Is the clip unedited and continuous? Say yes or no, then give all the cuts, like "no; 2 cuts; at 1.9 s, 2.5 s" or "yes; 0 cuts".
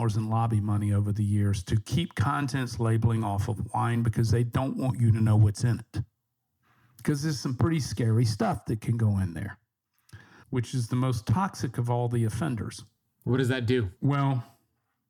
no; 2 cuts; at 10.4 s, 14.0 s